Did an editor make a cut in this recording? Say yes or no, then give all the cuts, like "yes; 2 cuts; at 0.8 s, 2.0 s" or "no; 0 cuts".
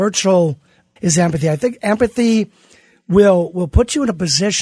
yes; 1 cut; at 1.0 s